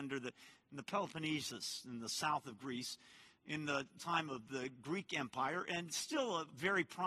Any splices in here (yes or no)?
no